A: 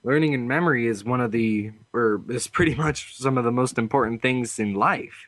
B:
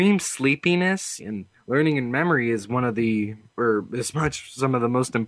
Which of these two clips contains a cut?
B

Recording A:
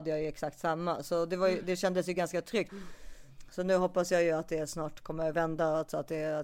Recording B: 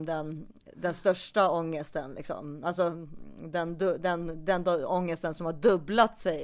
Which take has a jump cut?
A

